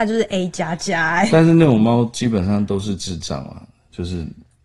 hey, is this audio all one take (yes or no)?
yes